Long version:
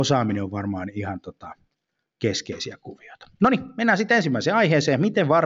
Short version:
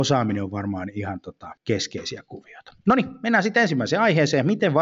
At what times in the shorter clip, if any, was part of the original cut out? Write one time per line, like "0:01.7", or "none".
0:01.6

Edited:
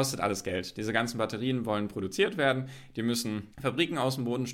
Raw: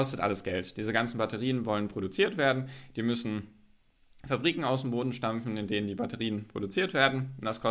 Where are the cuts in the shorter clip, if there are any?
0:03.5

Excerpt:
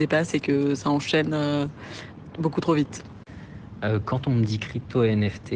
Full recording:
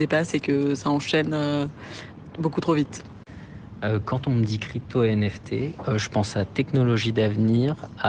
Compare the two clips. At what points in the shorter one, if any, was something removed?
none

